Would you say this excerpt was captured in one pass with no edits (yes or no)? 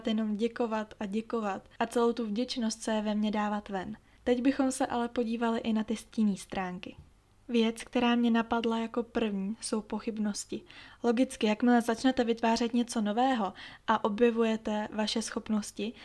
yes